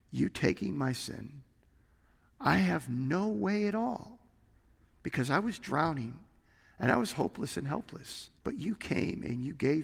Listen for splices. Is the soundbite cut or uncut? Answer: cut